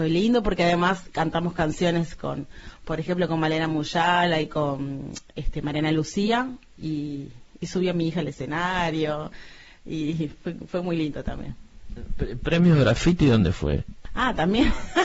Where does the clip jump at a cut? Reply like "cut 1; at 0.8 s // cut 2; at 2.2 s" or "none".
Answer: none